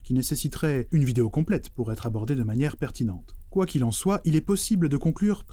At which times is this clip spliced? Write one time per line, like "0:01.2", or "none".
none